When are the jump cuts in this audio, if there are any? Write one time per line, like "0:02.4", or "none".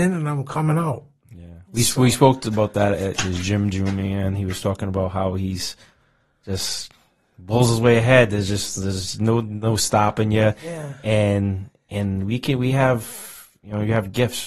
none